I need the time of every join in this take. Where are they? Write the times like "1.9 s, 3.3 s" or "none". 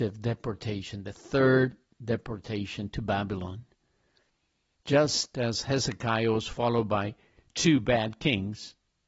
4.7 s